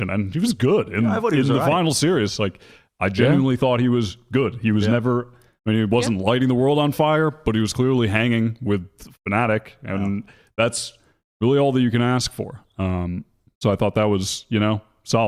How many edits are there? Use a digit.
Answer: 0